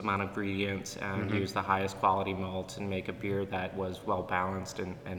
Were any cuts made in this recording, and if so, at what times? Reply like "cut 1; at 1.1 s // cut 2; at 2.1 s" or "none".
none

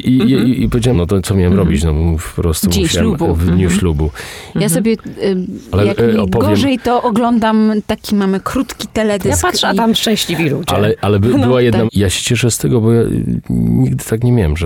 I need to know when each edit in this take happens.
cut 1; at 0.9 s // cut 2; at 4.5 s // cut 3; at 11.9 s

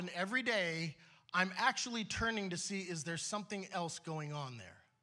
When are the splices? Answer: none

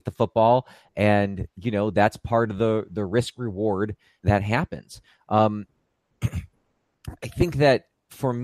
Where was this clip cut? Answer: cut 1; at 4.2 s

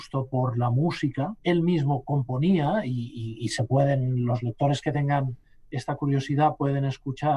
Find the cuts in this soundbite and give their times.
cut 1; at 1.4 s

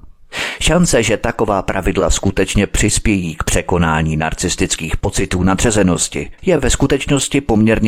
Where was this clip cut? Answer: cut 1; at 6.4 s

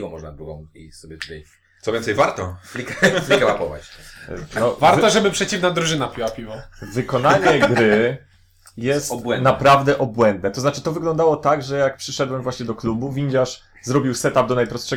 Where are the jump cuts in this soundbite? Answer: none

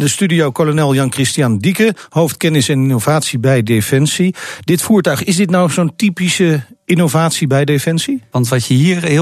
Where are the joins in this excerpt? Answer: cut 1; at 8.3 s

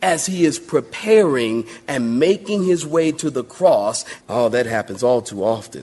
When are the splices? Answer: cut 1; at 4.2 s

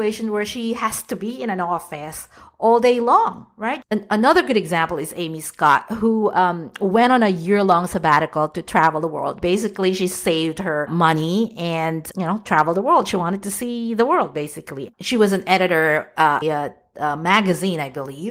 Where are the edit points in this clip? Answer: cut 1; at 3.8 s // cut 2; at 14.9 s // cut 3; at 16.4 s

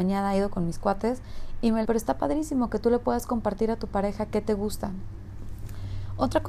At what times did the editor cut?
cut 1; at 1.8 s

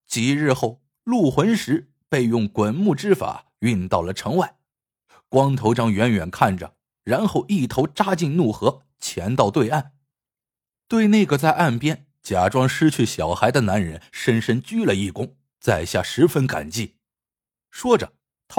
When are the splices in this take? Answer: cut 1; at 15.5 s

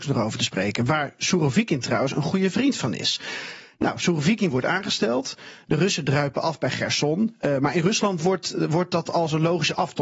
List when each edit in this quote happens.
none

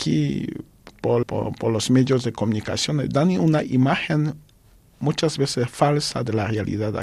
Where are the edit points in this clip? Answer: cut 1; at 1.2 s

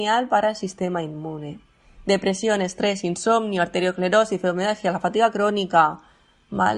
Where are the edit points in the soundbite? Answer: none

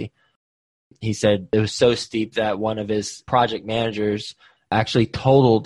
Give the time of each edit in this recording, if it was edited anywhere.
cut 1; at 4.6 s

